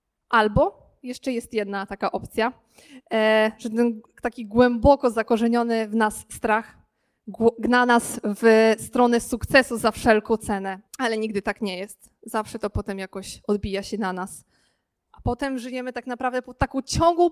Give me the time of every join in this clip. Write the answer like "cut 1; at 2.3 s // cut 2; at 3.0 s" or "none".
cut 1; at 10.9 s // cut 2; at 15.1 s